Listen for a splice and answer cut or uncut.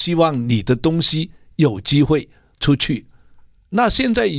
uncut